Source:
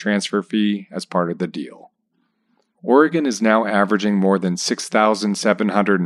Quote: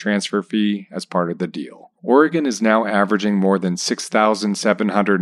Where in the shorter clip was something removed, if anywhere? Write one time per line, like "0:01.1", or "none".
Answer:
0:02.0